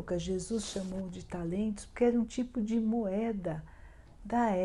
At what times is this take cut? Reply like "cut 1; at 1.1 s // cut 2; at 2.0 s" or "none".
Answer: none

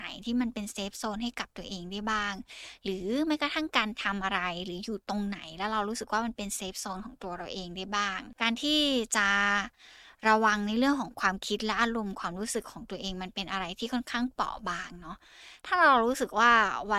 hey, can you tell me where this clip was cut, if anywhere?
none

